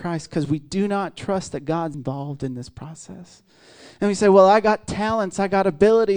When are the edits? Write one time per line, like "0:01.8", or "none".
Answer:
0:01.9